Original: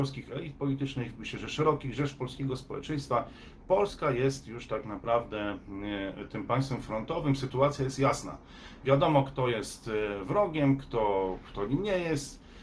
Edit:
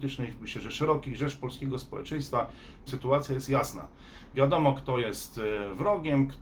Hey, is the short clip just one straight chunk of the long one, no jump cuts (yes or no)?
no